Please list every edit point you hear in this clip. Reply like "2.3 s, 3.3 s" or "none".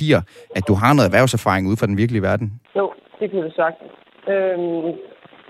2.7 s

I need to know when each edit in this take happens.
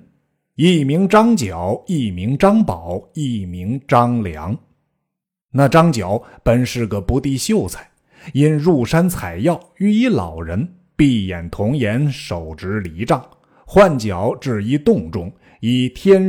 none

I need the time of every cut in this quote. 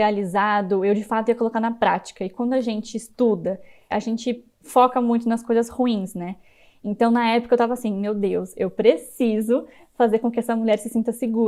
3.9 s

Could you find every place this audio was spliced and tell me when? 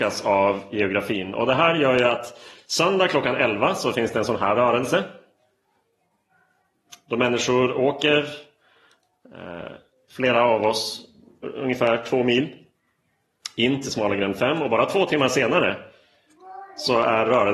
none

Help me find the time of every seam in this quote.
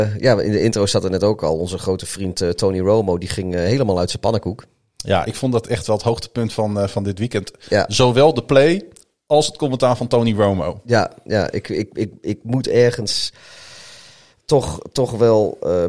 none

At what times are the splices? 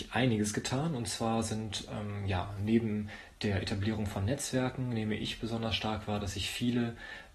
none

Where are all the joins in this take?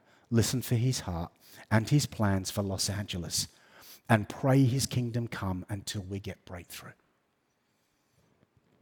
none

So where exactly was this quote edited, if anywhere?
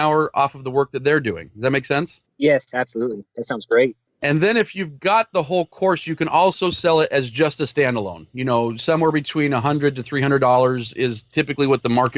none

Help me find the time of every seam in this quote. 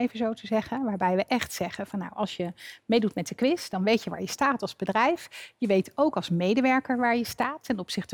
none

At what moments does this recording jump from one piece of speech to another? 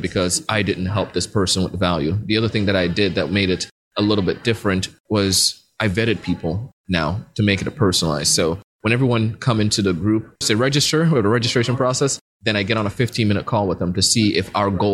10.4 s

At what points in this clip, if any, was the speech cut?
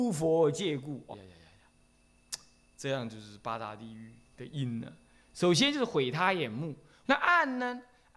1.1 s, 7.0 s

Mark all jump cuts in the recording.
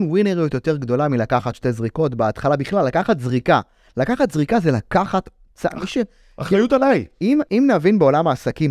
7.5 s

